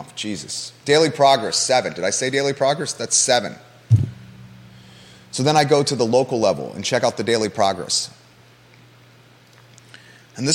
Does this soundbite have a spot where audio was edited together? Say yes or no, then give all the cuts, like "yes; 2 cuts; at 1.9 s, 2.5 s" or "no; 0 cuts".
no; 0 cuts